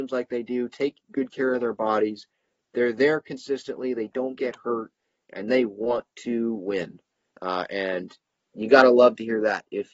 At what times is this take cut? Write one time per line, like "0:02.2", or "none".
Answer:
none

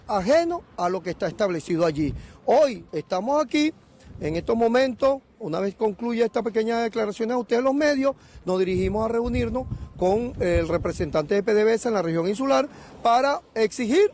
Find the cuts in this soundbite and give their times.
0:02.9

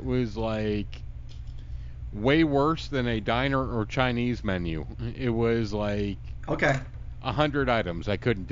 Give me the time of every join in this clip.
none

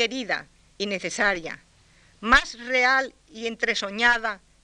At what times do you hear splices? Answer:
none

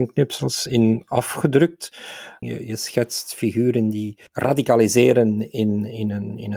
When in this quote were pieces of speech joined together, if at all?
0:02.4
0:04.3

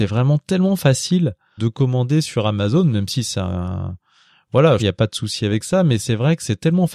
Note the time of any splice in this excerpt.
0:01.6
0:04.8

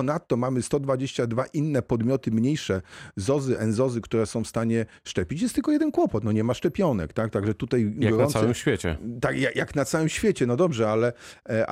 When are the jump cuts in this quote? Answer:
none

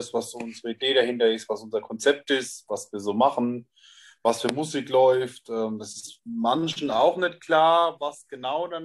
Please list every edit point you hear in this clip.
none

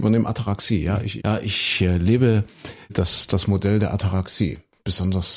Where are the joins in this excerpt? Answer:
0:01.2
0:02.9

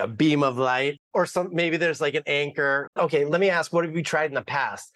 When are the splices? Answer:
0:01.0
0:02.9

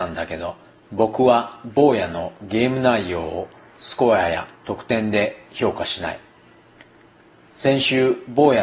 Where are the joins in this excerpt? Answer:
0:04.6

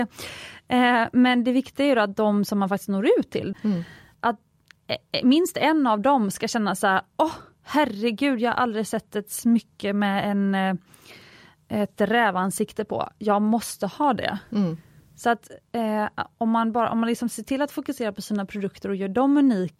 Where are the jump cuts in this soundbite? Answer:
0:03.5

